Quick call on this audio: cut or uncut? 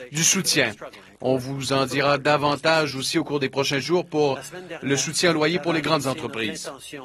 cut